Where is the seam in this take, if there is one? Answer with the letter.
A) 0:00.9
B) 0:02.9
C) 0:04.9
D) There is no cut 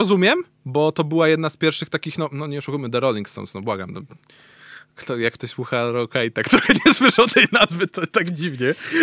D